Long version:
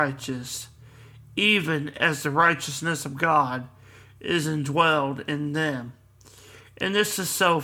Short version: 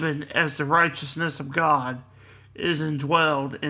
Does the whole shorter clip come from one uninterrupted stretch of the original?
yes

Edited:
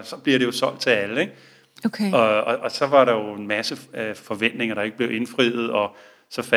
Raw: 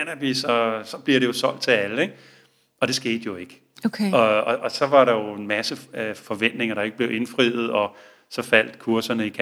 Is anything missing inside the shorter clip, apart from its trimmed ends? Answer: yes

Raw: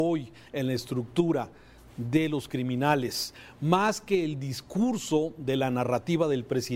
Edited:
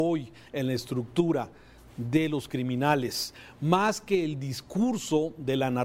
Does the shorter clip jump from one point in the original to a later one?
no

